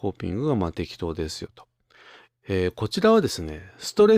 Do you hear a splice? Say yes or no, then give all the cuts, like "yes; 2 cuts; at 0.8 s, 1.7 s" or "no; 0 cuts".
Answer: yes; 1 cut; at 2.3 s